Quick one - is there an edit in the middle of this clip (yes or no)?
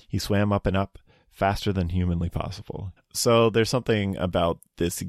yes